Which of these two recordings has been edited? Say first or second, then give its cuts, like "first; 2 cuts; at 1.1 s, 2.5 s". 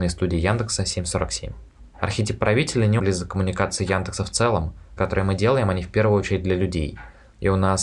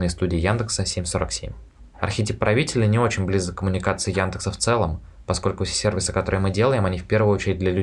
first; 2 cuts; at 3.0 s, 5.0 s